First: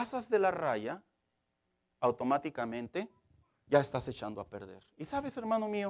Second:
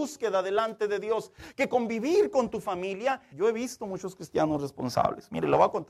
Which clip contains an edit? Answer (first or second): second